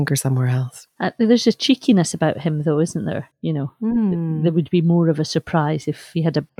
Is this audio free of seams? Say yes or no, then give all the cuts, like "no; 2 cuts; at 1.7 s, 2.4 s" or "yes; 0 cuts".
yes; 0 cuts